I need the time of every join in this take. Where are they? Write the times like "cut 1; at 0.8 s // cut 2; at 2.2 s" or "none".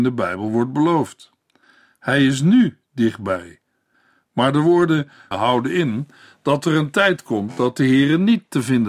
cut 1; at 5.3 s